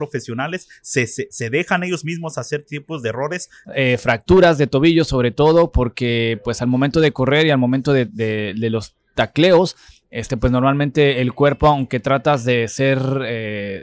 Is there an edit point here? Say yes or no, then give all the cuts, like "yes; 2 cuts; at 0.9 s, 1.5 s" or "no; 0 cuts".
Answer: yes; 1 cut; at 3.6 s